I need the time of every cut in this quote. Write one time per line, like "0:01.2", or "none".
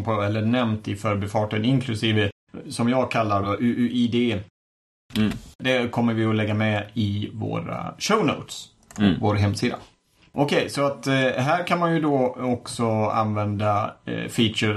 0:03.4